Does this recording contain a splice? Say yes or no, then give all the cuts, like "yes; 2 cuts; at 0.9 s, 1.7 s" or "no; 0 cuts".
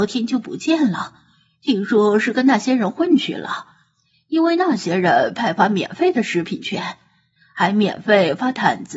no; 0 cuts